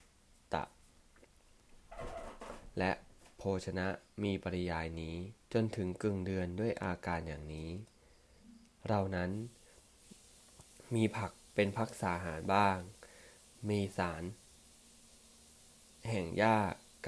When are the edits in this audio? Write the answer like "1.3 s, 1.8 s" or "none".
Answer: 5.4 s